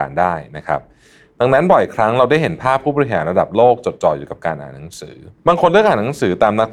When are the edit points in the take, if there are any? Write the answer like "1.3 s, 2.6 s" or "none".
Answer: 5.4 s